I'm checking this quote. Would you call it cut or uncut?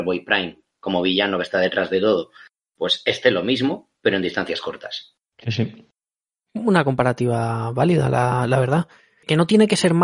uncut